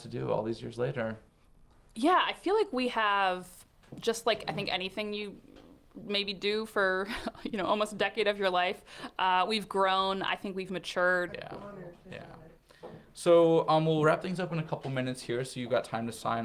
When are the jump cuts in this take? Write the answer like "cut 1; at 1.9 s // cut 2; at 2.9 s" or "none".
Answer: cut 1; at 11.3 s